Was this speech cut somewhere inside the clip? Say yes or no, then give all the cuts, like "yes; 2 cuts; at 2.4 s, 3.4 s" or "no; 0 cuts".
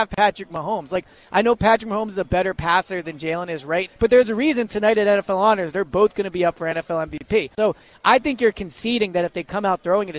yes; 2 cuts; at 3.9 s, 7.5 s